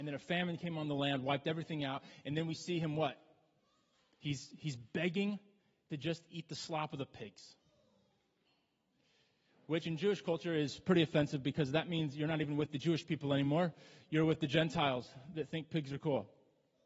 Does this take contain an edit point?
no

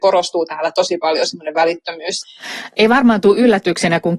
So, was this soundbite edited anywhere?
no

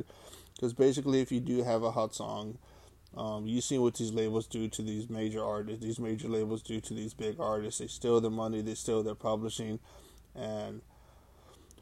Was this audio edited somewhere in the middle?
no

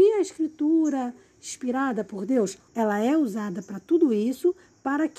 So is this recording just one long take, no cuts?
no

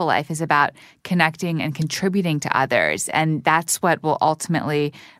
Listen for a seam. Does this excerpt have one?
no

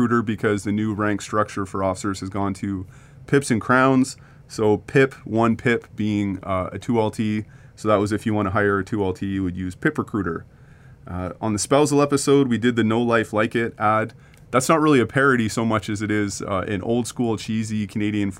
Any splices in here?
no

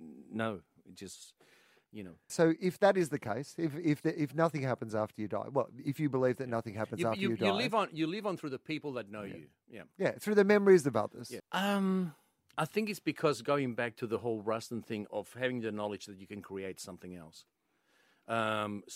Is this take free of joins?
no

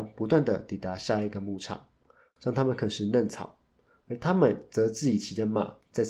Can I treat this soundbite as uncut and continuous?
yes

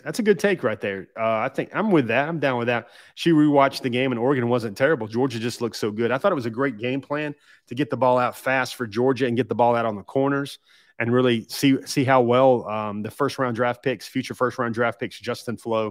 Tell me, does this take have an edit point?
no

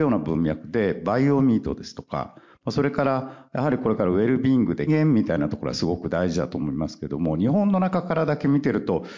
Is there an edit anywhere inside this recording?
yes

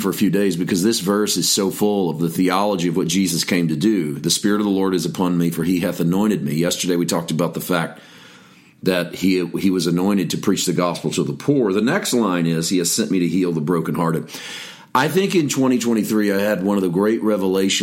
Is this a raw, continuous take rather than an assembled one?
yes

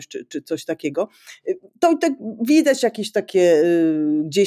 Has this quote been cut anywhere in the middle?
no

